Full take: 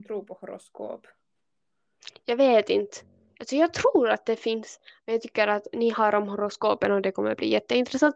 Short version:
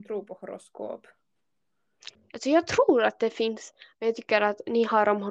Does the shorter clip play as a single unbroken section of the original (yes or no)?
no